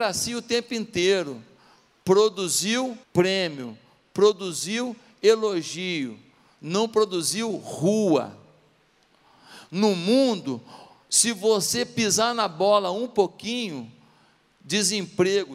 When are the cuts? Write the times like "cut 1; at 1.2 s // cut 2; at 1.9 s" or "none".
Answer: cut 1; at 3.0 s

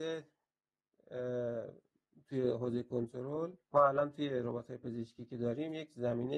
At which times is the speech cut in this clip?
cut 1; at 3.6 s

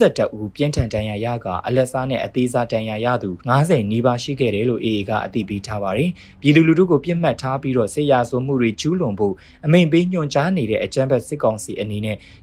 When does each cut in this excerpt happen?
cut 1; at 3.4 s

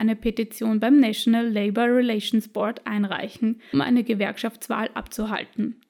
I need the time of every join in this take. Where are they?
cut 1; at 3.7 s

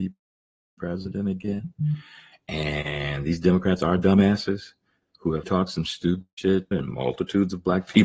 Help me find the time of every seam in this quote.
cut 1; at 5.4 s // cut 2; at 6.7 s

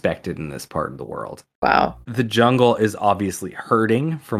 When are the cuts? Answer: cut 1; at 2.0 s

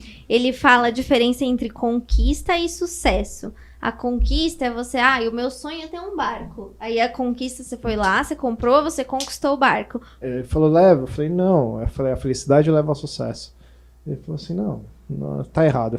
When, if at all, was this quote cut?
cut 1; at 10.2 s

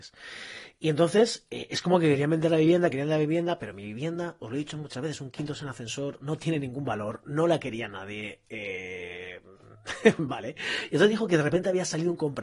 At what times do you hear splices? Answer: none

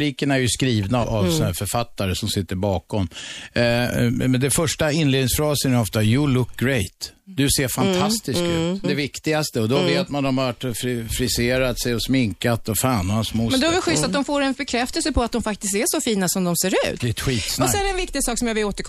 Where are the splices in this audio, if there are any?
cut 1; at 1.0 s // cut 2; at 8.8 s // cut 3; at 17.0 s

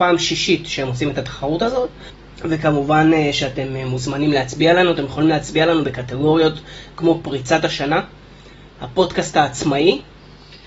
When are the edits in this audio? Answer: none

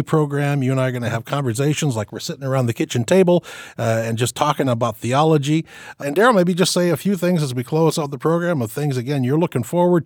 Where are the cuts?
none

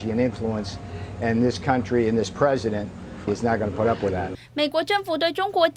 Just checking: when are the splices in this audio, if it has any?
cut 1; at 3.3 s

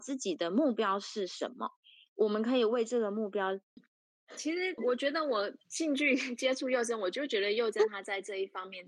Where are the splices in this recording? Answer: cut 1; at 3.8 s // cut 2; at 4.8 s

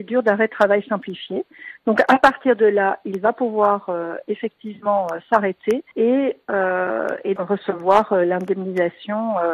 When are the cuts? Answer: cut 1; at 5.9 s // cut 2; at 7.4 s

